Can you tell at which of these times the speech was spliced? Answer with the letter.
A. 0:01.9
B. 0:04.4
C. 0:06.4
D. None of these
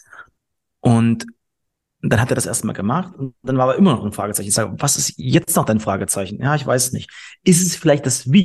D